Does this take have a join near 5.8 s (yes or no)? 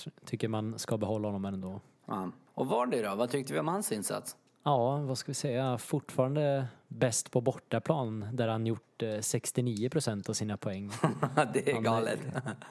no